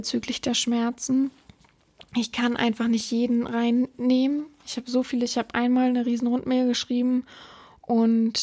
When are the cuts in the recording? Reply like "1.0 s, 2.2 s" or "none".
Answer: none